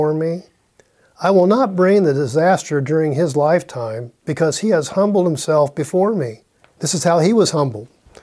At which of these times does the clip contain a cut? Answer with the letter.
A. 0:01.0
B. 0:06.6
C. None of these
B